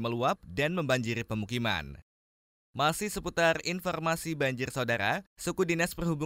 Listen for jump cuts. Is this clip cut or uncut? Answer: uncut